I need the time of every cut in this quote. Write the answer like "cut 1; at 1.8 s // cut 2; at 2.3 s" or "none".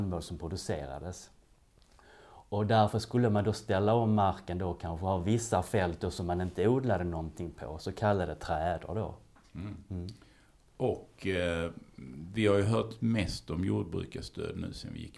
none